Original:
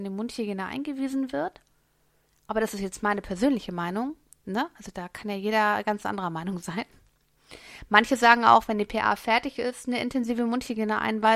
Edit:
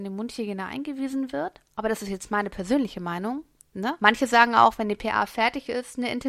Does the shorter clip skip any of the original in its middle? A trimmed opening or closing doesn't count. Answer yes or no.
yes